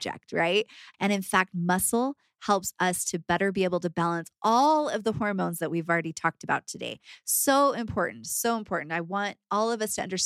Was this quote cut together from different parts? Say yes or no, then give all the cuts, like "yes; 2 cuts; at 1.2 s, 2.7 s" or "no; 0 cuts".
yes; 1 cut; at 0.9 s